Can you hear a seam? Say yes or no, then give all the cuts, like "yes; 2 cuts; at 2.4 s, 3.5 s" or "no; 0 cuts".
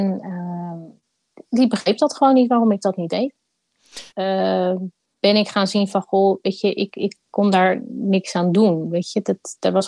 yes; 1 cut; at 4.1 s